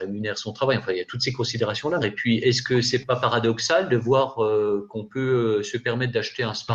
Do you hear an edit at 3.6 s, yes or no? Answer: no